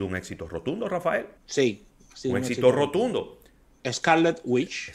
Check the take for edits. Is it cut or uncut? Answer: cut